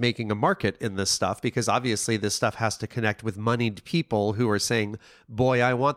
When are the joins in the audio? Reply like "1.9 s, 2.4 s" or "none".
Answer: none